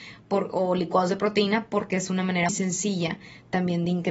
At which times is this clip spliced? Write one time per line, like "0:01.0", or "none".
0:02.5